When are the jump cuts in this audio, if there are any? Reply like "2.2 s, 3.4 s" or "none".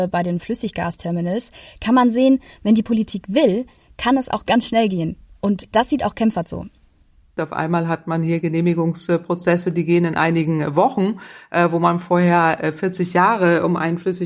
none